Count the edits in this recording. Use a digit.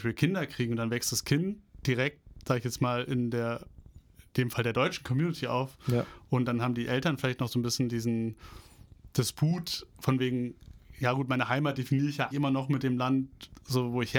1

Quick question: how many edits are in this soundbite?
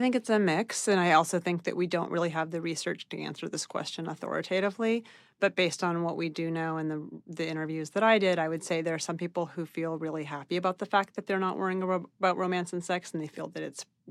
0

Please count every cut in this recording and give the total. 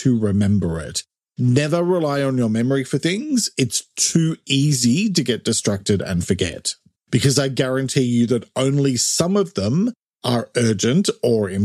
1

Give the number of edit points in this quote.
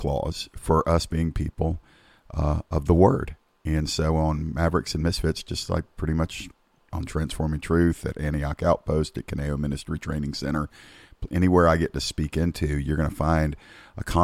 0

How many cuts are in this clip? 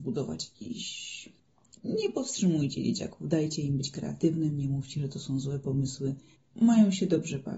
1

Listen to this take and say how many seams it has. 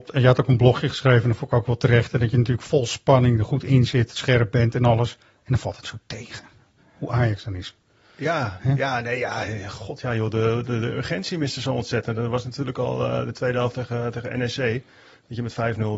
0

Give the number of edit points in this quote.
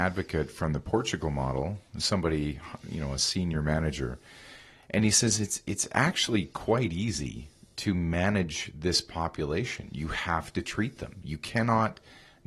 1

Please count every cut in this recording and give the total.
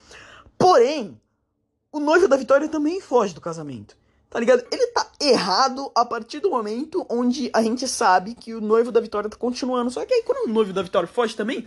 1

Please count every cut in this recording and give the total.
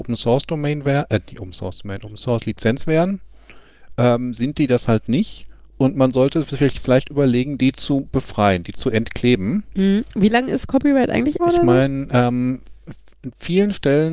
1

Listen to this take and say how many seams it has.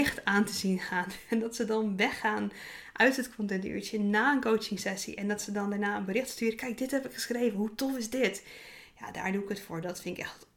0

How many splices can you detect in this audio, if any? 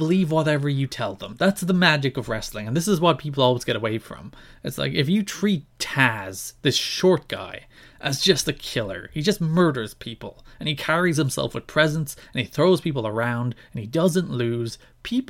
0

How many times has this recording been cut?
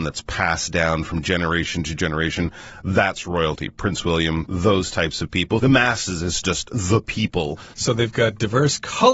3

